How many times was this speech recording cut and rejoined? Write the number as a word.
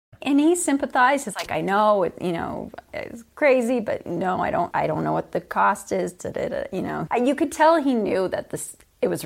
two